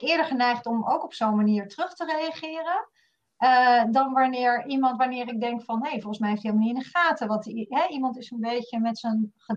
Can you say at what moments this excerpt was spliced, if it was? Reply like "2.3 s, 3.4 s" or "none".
none